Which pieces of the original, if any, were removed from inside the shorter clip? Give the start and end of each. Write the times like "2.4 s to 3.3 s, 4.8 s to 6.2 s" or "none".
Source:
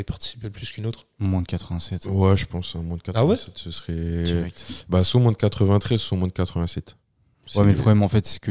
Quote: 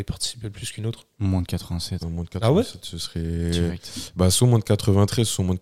2.0 s to 2.7 s